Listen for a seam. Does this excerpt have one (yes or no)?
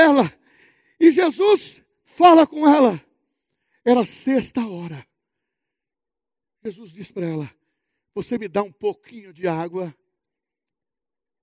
no